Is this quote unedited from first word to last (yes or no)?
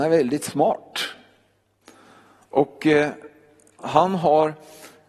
no